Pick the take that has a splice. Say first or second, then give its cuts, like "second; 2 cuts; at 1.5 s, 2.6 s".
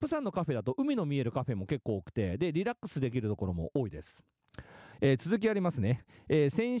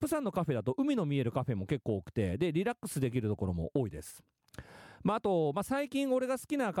first; 1 cut; at 4.9 s